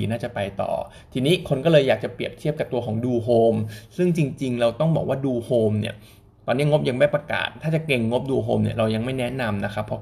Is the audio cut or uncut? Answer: uncut